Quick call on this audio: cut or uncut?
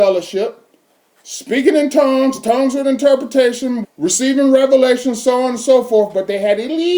cut